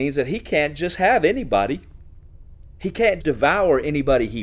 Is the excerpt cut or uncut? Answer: cut